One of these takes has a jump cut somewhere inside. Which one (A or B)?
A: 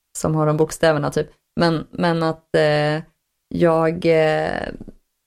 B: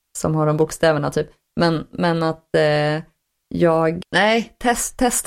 B